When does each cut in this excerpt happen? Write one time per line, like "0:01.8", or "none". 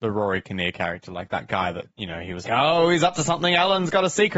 0:02.4